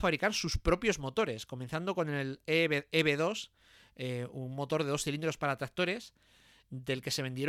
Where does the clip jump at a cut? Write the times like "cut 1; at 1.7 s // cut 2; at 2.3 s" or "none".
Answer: none